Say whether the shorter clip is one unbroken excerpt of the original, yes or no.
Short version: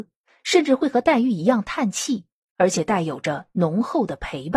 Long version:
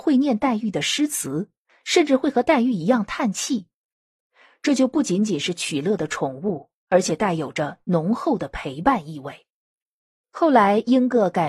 no